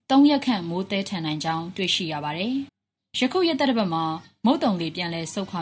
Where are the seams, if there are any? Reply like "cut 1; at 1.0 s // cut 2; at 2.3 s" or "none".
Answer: cut 1; at 2.7 s